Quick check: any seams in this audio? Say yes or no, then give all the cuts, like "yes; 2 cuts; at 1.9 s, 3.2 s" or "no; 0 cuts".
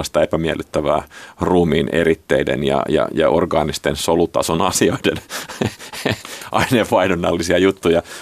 no; 0 cuts